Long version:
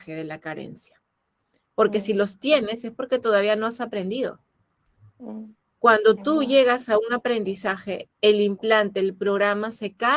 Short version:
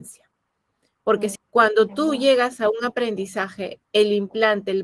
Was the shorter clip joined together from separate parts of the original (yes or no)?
yes